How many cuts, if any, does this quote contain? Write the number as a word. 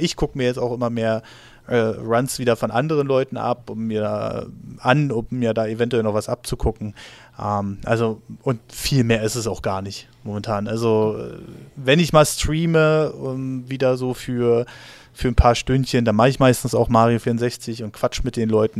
zero